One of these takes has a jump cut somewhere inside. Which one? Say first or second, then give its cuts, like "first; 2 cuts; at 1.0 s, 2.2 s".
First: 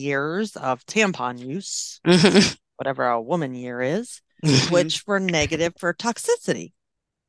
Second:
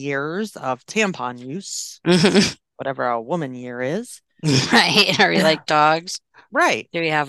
first; 1 cut; at 4.7 s